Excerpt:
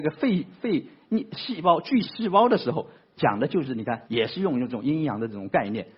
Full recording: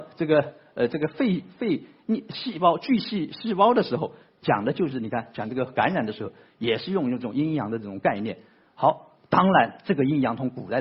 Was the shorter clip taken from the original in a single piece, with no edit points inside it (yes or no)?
no